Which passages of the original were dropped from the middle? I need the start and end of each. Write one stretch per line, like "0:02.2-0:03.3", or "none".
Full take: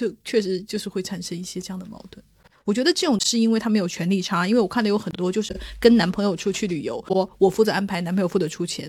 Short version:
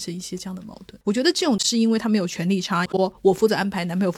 0:02.2-0:02.6
0:04.5-0:07.0